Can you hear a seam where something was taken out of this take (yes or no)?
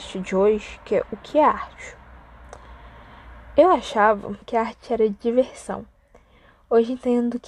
yes